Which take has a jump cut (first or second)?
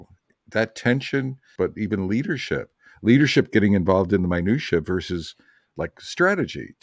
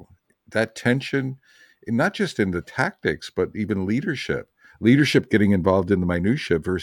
first